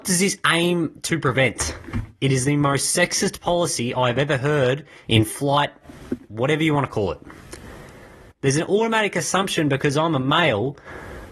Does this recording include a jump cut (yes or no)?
yes